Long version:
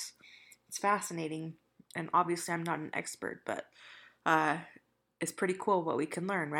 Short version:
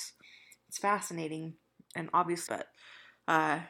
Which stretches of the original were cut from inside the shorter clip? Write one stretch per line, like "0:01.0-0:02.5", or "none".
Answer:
0:02.5-0:03.4